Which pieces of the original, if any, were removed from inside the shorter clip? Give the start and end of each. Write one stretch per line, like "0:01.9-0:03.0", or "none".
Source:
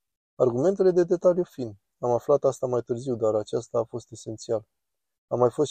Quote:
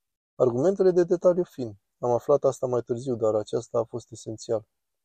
none